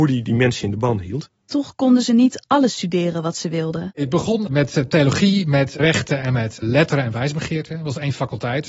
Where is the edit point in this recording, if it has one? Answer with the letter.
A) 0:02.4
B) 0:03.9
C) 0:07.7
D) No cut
D